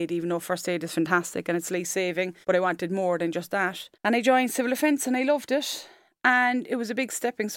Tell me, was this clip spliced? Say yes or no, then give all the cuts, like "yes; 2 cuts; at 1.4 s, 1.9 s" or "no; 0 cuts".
yes; 2 cuts; at 2.4 s, 3.9 s